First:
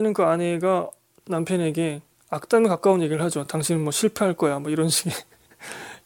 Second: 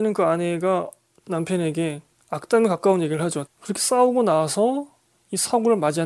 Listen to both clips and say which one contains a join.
second; 1 cut; at 3.5 s

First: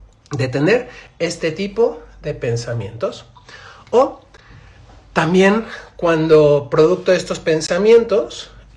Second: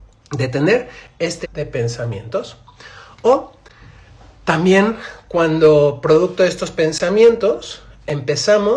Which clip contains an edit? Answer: second; 1 cut; at 1.4 s

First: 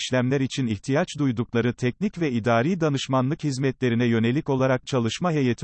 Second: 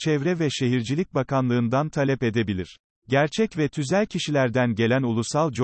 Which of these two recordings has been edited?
second; 1 cut; at 3.0 s

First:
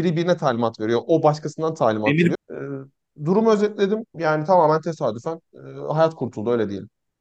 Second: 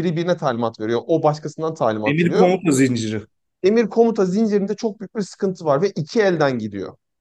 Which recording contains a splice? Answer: first; 2 cuts; at 2.3 s, 4.1 s

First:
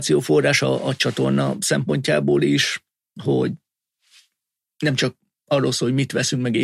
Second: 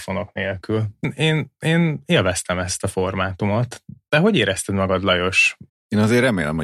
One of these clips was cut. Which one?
second; 2 cuts; at 1.0 s, 5.7 s

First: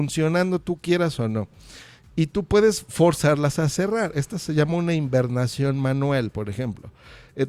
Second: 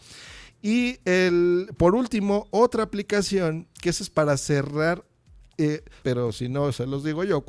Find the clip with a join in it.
second; 1 cut; at 6.0 s

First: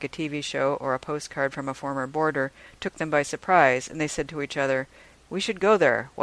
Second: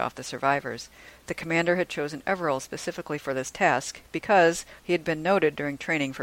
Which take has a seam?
second; 1 cut; at 4.8 s

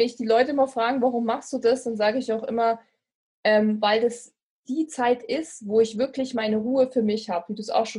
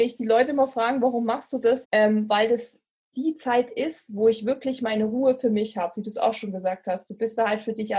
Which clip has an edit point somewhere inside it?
second; 1 cut; at 1.8 s

